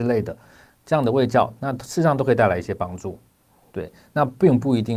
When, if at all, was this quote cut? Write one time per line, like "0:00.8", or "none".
none